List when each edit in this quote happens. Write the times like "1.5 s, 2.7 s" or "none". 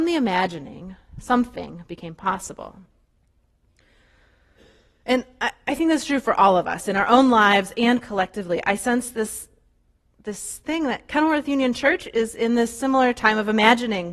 none